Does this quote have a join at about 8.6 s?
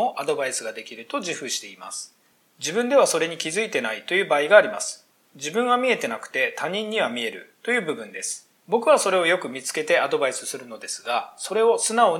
yes; 2 cuts; at 2.4 s, 8.6 s

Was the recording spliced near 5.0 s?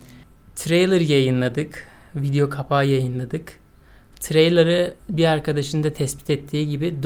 yes; 1 cut; at 5.0 s

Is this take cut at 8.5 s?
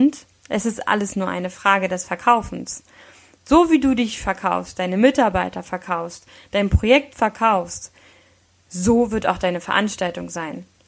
no; 0 cuts

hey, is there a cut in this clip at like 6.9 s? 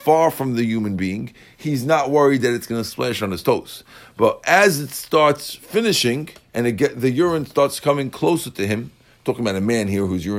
no; 0 cuts

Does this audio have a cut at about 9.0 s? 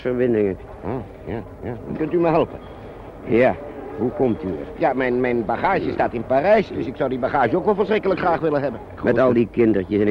yes; 2 cuts; at 1.9 s, 9.0 s

